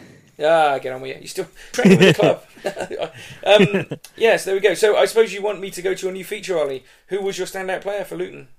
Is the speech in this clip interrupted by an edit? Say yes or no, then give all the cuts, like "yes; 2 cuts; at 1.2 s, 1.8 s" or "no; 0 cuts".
yes; 1 cut; at 1.7 s